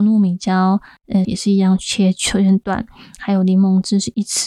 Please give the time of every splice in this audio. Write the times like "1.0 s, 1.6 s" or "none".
1.2 s